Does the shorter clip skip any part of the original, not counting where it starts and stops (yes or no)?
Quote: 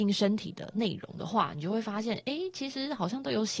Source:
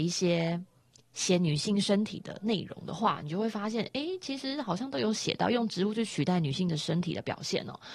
no